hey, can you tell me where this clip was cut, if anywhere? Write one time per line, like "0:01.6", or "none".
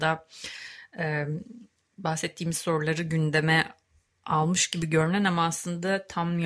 none